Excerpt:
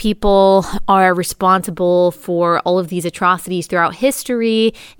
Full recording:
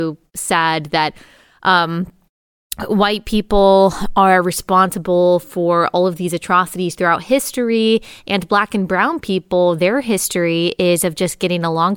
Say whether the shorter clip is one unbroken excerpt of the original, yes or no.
yes